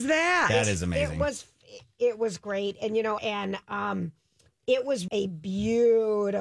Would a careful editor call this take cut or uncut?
cut